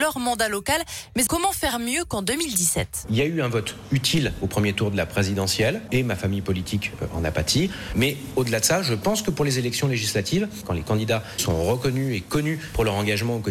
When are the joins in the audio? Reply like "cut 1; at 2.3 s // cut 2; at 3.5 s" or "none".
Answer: cut 1; at 1.3 s